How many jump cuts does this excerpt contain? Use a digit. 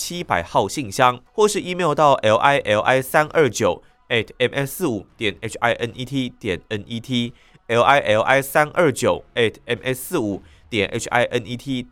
1